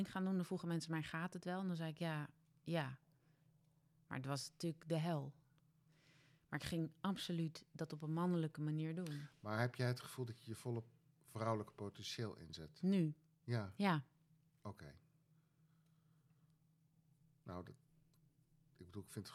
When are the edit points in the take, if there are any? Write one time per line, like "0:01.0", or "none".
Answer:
none